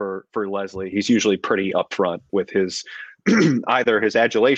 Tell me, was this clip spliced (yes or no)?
yes